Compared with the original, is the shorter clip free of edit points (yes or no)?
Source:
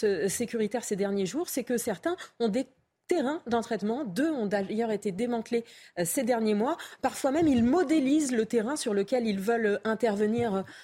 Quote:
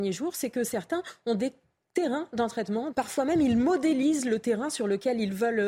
no